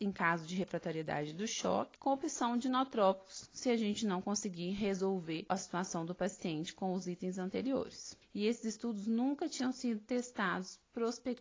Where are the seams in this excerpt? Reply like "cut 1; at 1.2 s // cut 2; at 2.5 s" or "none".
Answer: cut 1; at 8.2 s